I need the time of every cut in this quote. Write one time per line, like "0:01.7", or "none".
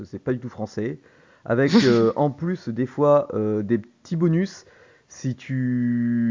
none

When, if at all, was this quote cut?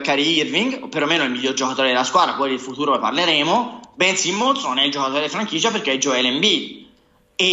none

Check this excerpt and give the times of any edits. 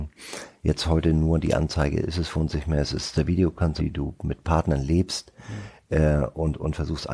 0:03.8

